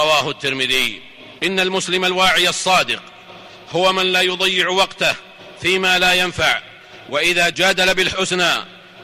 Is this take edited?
yes; 2 cuts; at 1.4 s, 7.5 s

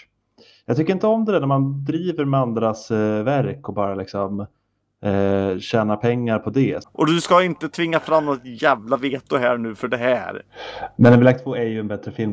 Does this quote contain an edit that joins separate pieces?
yes; 1 cut; at 6.8 s

